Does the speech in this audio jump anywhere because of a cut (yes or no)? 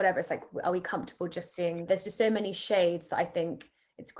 yes